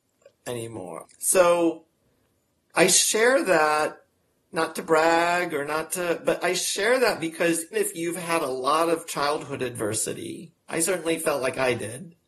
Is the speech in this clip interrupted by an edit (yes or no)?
yes